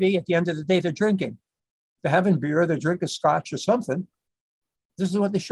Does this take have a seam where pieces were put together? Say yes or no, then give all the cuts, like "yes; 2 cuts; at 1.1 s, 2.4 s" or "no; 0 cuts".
no; 0 cuts